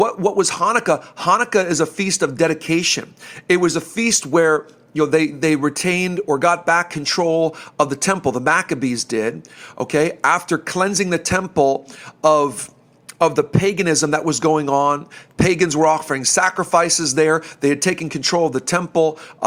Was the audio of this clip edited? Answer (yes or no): no